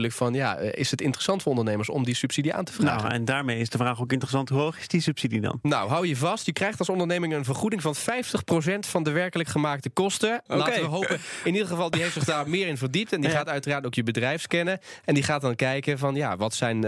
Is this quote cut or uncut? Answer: cut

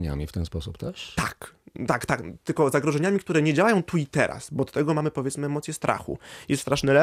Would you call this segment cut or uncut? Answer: uncut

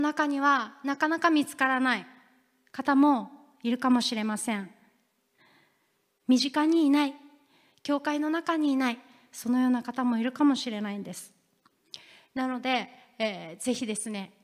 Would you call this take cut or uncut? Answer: uncut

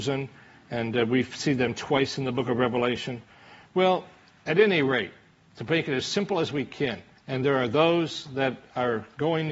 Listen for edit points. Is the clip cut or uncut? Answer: cut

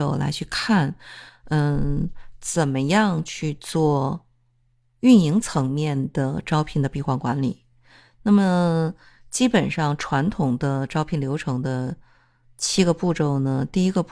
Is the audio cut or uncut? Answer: uncut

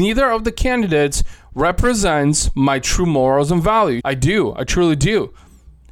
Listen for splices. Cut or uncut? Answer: cut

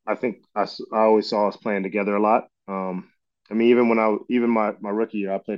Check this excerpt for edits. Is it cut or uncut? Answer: uncut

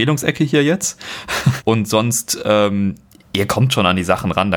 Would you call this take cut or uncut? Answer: cut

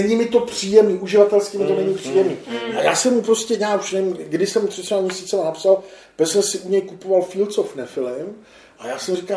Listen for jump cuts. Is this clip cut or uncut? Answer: uncut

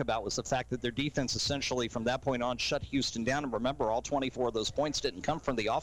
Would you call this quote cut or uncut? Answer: uncut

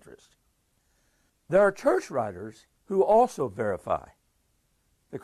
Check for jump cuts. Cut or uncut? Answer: cut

